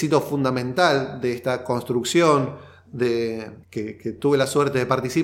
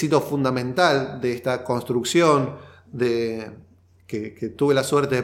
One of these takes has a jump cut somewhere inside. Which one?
first; 1 cut; at 3.6 s

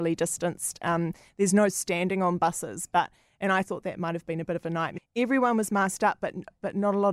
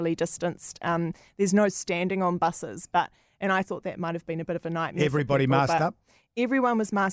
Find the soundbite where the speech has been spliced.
first; 1 cut; at 5.0 s

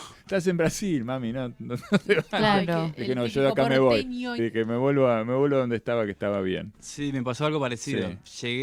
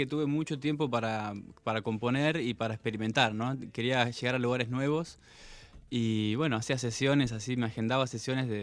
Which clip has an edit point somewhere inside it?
first; 1 cut; at 4.4 s

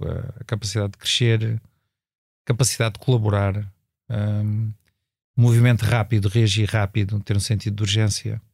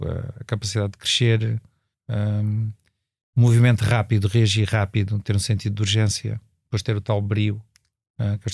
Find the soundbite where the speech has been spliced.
second; 1 cut; at 1.9 s

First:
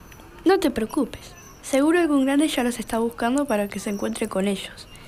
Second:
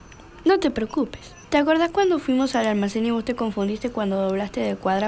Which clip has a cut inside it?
second; 1 cut; at 1.4 s

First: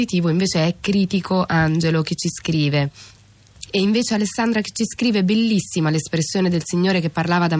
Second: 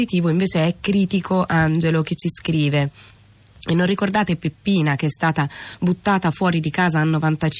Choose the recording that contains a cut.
first; 1 cut; at 3.7 s

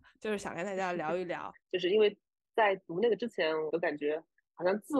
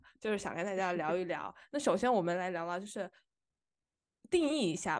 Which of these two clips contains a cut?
first; 2 cuts; at 1.5 s, 3.7 s

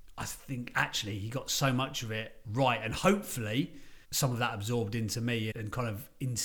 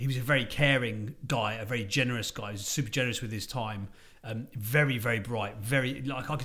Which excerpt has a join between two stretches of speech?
first; 2 cuts; at 4.0 s, 5.5 s

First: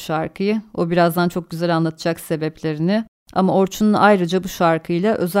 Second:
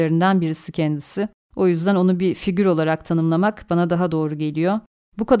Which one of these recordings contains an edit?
second; 1 cut; at 1.4 s

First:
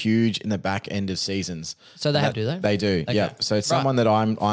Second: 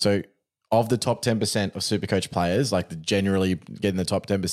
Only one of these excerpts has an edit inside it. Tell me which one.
first; 1 cut; at 2.3 s

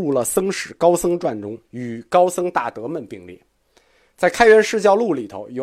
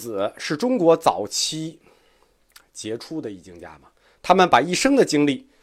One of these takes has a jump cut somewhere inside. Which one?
first; 1 cut; at 1.6 s

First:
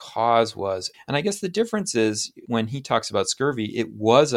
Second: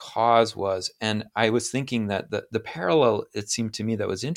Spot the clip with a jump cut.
first; 2 cuts; at 0.9 s, 2.4 s

